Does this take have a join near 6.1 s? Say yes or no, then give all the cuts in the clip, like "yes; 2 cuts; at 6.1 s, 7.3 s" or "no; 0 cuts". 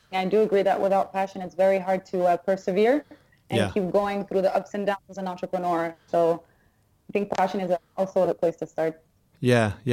yes; 1 cut; at 6.1 s